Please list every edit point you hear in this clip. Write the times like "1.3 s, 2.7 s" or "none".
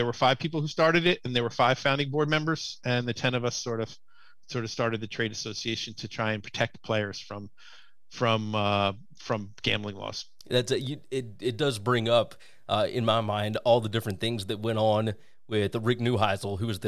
none